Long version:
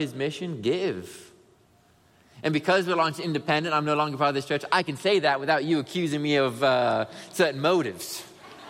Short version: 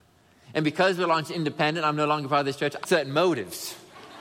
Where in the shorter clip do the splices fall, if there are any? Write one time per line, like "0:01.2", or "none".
0:02.8